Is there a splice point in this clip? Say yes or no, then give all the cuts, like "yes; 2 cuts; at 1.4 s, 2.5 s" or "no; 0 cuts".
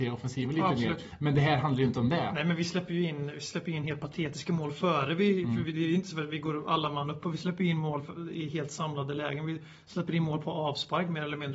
no; 0 cuts